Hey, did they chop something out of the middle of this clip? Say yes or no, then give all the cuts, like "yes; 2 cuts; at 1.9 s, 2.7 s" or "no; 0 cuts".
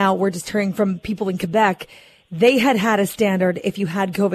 no; 0 cuts